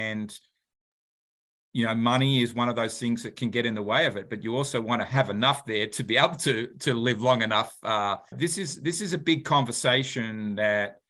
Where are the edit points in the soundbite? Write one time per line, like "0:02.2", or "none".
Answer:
0:08.3